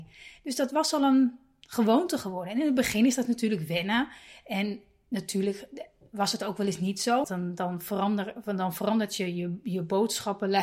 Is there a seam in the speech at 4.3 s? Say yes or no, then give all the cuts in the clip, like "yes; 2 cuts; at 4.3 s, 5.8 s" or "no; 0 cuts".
no; 1 cut; at 7.2 s